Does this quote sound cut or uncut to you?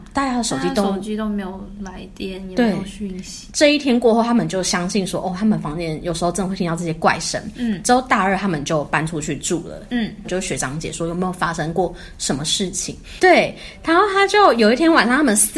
cut